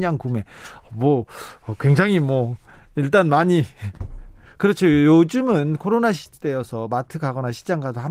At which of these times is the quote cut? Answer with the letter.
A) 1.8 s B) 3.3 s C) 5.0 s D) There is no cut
D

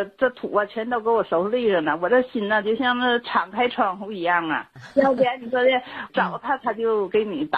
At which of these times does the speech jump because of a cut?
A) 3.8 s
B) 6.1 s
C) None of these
B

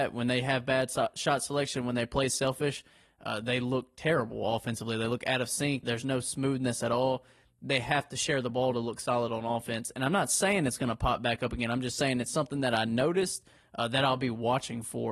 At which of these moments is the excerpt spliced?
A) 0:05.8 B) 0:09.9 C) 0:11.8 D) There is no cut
A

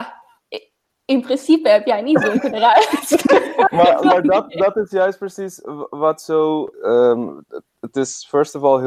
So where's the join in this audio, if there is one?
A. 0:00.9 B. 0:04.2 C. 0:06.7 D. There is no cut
C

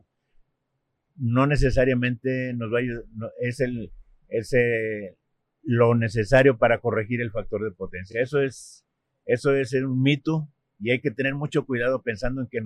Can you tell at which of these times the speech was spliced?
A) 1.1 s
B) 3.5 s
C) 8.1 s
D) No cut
D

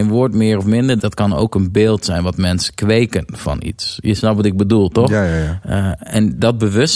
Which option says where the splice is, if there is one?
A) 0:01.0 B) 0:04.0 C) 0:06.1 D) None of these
A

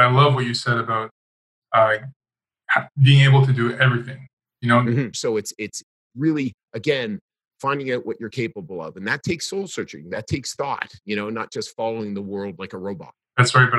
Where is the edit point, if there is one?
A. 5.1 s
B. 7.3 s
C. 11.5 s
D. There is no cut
A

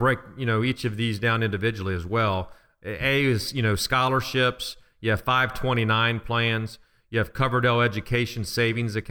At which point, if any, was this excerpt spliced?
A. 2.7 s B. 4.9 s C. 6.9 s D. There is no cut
D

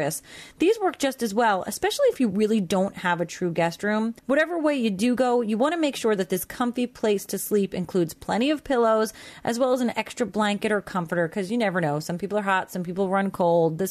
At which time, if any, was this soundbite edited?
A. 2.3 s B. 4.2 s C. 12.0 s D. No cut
B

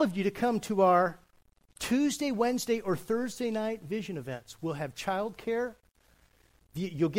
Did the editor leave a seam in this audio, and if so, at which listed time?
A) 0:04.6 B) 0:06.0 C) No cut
C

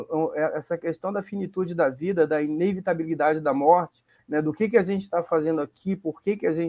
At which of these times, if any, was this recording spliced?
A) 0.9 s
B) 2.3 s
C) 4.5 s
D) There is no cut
D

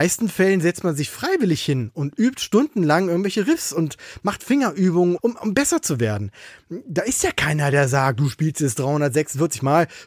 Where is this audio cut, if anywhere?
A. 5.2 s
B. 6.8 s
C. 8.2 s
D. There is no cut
A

